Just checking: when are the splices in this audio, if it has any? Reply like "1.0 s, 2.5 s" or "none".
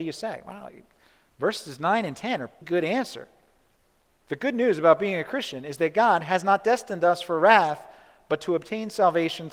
2.6 s